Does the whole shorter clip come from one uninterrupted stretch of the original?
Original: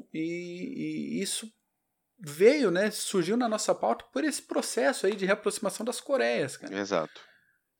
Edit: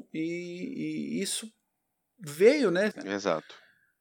no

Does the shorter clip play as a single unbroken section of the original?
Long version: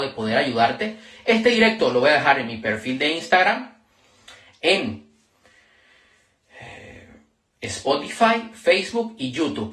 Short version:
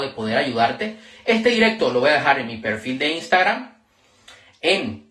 yes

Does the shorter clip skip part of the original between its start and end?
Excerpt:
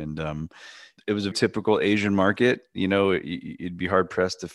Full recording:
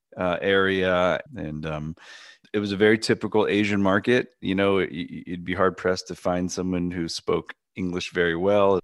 yes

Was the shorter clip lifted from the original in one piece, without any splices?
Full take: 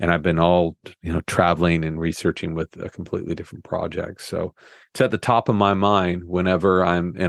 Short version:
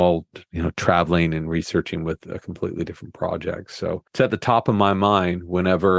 no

